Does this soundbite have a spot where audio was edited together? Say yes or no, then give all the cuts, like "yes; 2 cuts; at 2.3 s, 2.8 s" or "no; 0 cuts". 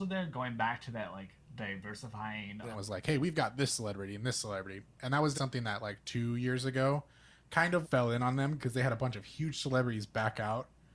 yes; 3 cuts; at 2.7 s, 5.3 s, 7.8 s